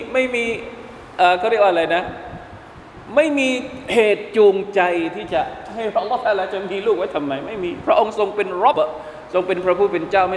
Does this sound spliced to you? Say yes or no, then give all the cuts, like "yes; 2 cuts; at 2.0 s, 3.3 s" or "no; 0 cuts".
yes; 1 cut; at 8.7 s